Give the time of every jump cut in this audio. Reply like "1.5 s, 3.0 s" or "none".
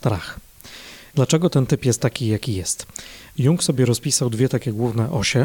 1.1 s